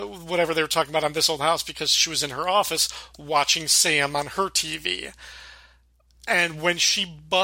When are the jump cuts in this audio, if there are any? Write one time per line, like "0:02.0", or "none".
none